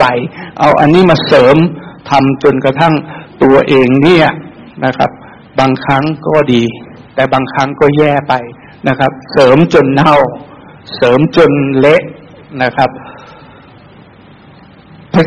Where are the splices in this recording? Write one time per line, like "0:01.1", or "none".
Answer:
none